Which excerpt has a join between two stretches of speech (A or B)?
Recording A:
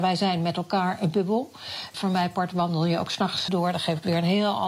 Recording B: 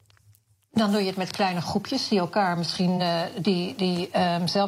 A